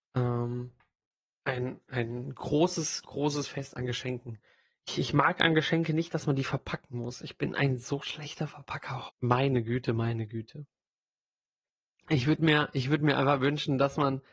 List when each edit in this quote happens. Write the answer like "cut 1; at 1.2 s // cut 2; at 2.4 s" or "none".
cut 1; at 9.1 s